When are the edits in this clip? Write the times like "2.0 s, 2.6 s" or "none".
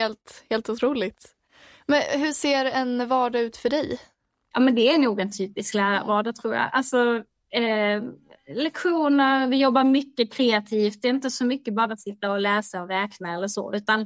none